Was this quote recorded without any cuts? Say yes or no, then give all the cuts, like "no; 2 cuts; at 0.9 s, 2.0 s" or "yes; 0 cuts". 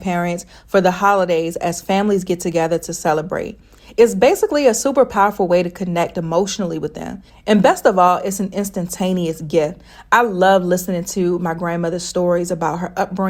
no; 1 cut; at 7.3 s